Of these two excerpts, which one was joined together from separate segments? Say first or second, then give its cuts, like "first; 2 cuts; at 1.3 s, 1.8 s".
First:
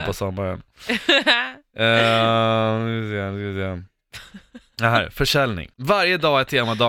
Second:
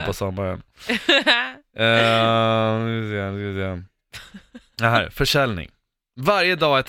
first; 1 cut; at 5.7 s